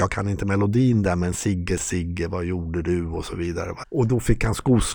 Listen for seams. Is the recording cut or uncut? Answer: cut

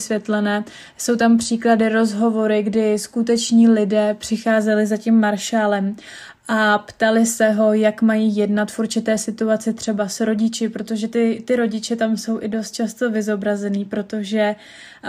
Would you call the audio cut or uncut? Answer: uncut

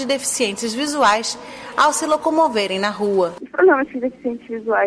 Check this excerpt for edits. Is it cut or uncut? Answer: uncut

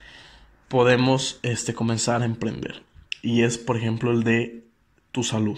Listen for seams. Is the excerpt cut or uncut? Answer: uncut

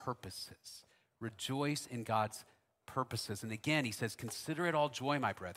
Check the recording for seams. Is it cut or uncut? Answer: uncut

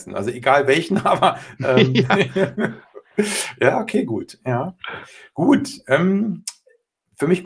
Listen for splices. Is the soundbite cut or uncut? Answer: uncut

